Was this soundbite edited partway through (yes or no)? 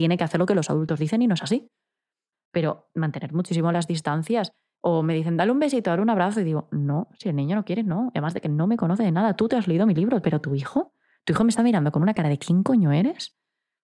yes